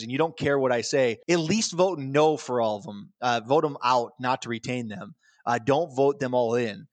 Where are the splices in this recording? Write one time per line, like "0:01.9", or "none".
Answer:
0:01.2